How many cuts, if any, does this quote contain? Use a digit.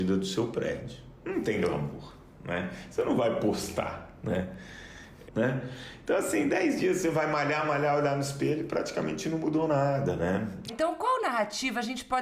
2